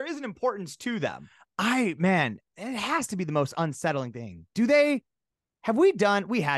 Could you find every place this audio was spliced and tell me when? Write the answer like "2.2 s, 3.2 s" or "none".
2.5 s